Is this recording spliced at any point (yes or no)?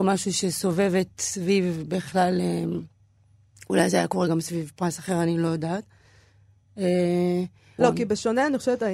yes